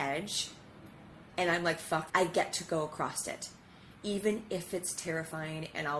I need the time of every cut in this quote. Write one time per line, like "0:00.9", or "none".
0:02.1